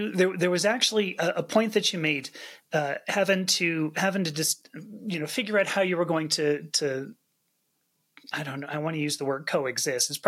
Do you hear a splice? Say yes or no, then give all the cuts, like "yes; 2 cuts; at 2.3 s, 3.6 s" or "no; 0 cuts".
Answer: no; 0 cuts